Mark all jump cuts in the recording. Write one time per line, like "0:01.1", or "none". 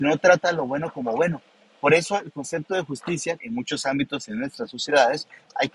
0:01.8
0:03.4